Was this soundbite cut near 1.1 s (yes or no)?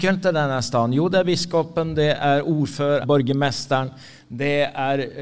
no